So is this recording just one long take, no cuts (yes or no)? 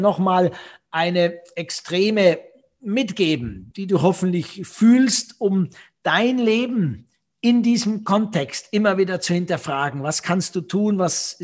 no